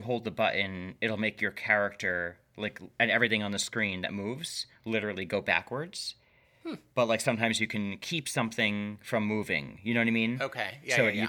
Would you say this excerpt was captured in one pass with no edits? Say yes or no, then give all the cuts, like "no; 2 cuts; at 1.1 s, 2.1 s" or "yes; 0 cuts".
yes; 0 cuts